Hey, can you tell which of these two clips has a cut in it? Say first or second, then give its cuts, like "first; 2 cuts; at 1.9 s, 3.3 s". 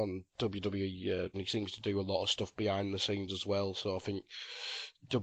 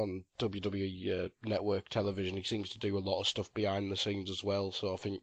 first; 1 cut; at 1.3 s